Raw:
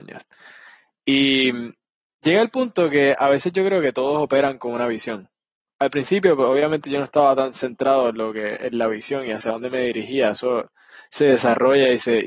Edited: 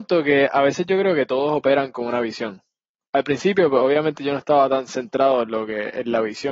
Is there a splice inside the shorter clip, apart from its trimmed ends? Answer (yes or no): no